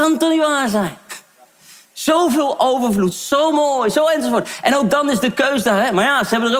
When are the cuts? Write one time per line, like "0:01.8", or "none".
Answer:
none